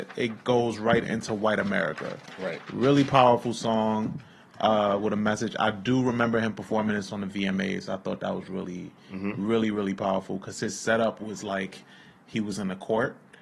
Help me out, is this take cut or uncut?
uncut